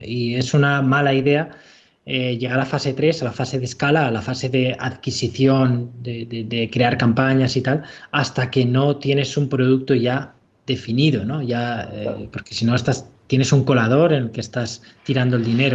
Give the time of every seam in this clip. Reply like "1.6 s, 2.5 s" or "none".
none